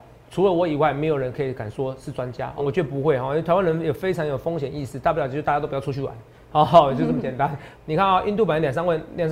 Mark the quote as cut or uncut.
cut